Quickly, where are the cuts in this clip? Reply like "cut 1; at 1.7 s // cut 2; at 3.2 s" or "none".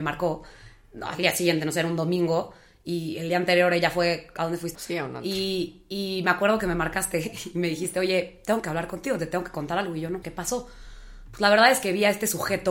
cut 1; at 4.7 s // cut 2; at 10.2 s